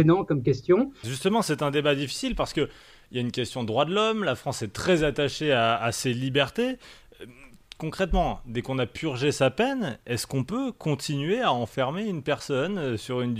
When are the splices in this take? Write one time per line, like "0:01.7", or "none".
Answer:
0:01.0